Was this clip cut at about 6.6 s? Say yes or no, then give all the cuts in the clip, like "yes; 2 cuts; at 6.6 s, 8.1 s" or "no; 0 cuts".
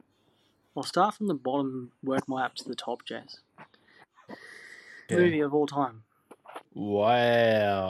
yes; 2 cuts; at 5.1 s, 6.6 s